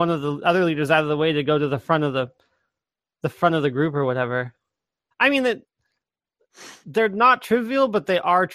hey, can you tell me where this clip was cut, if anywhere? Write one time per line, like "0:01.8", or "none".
0:05.1